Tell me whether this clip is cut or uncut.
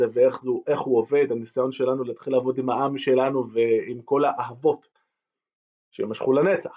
uncut